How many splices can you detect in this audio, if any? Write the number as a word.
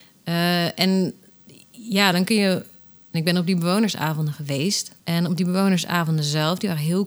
two